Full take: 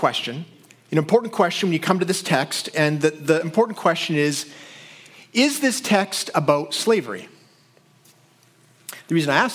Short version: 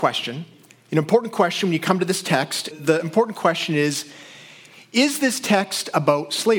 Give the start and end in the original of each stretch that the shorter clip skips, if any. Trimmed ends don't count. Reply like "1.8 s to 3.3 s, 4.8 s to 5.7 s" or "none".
2.7 s to 3.1 s